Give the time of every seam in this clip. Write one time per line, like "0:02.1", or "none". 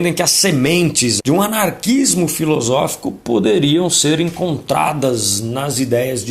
0:01.2